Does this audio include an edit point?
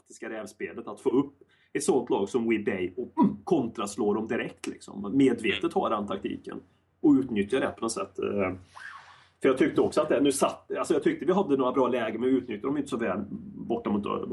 no; 0 cuts

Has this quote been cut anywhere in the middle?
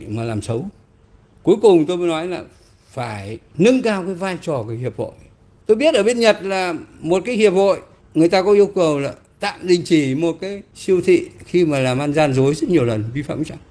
no; 0 cuts

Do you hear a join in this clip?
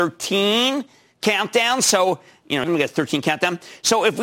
yes; 1 cut; at 2.6 s

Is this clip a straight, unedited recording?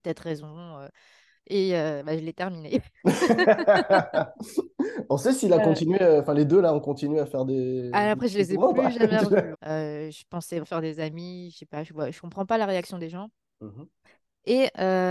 no; 3 cuts; at 1.4 s, 9.5 s, 10.6 s

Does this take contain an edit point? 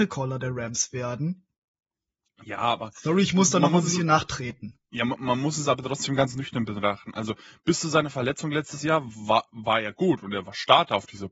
no; 0 cuts

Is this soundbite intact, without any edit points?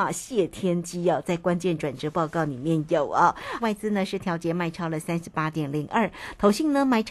no; 1 cut; at 3.6 s

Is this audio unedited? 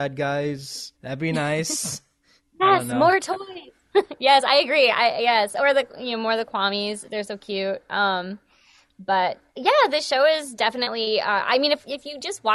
no; 1 cut; at 1.0 s

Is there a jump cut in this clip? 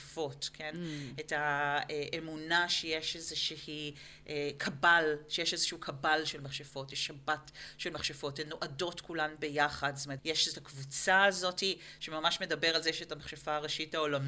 yes; 2 cuts; at 10.2 s, 12.0 s

